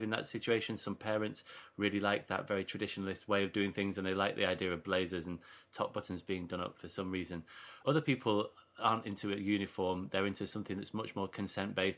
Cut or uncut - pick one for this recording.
cut